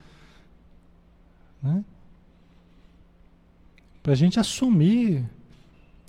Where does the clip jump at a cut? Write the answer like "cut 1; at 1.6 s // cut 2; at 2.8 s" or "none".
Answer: none